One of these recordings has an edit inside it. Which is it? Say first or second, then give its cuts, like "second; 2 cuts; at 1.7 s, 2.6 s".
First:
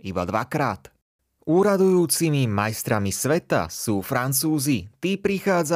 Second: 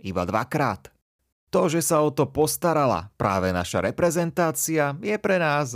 second; 1 cut; at 1.3 s